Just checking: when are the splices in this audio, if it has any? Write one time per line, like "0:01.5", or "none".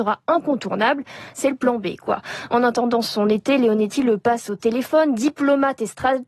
none